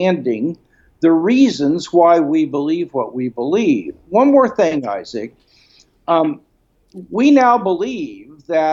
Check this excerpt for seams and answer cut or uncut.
uncut